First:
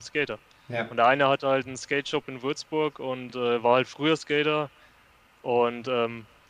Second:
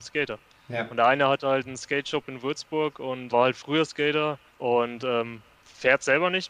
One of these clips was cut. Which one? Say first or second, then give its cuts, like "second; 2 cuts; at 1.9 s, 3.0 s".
second; 2 cuts; at 3.3 s, 4.5 s